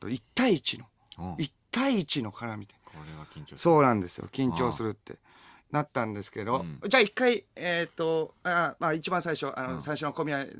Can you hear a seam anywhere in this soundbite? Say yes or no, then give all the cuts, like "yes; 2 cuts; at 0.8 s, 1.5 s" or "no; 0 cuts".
no; 0 cuts